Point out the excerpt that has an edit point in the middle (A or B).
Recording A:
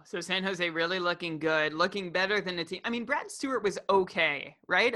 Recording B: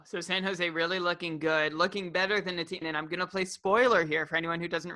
B